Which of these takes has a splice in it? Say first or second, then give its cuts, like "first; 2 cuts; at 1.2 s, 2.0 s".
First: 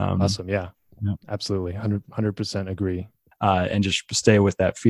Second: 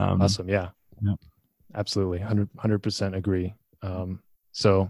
first; 2 cuts; at 1.2 s, 3.3 s